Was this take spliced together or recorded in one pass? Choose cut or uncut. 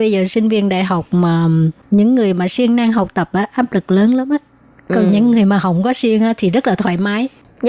uncut